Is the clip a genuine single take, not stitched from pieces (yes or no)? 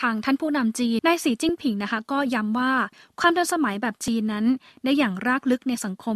no